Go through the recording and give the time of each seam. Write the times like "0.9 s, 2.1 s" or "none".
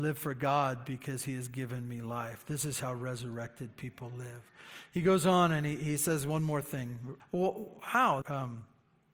7.2 s, 8.2 s